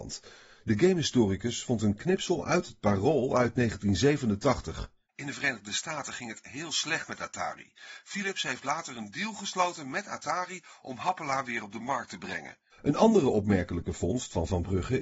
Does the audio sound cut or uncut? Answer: cut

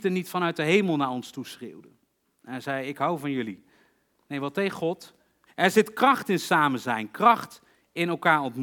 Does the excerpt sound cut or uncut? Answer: cut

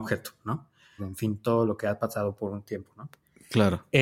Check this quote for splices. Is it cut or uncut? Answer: cut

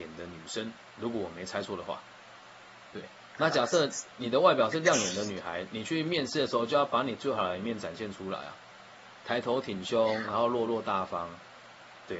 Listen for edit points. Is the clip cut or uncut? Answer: uncut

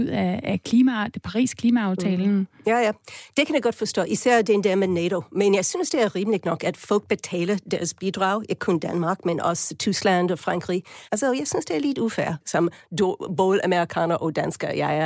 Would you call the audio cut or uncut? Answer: cut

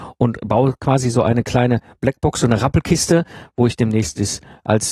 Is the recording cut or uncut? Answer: uncut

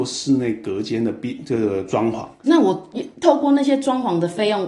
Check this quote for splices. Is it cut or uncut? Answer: uncut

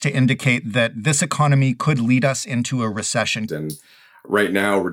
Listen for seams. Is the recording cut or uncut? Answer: cut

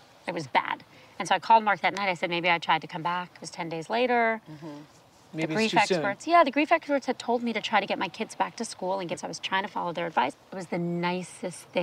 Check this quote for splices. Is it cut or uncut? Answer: cut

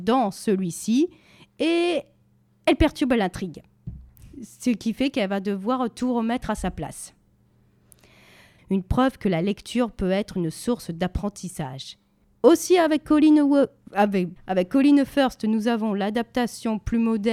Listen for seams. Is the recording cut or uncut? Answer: cut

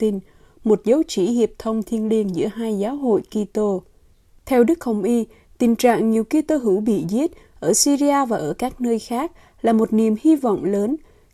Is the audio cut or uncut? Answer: uncut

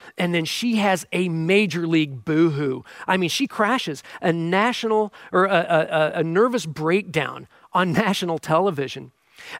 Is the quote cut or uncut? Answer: uncut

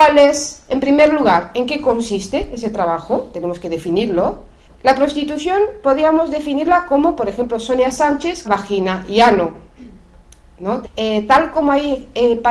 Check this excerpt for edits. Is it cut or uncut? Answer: cut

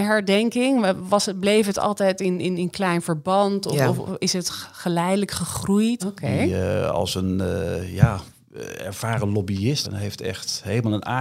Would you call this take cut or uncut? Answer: cut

